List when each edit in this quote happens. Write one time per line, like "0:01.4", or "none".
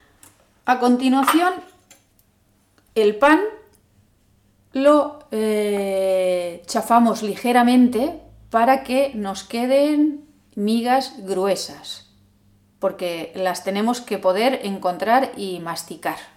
none